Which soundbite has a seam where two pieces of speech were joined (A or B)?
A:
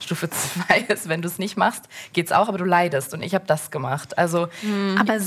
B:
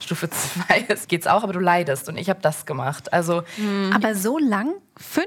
B